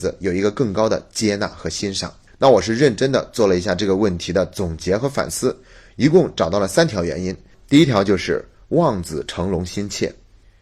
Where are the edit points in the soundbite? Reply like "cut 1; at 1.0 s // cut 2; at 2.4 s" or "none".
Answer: none